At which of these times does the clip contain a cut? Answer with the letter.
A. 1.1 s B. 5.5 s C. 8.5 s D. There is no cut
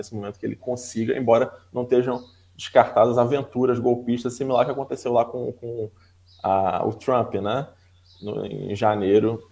D